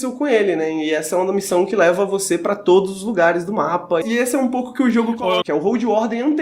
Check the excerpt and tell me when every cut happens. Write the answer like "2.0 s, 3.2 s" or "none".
4.0 s, 5.4 s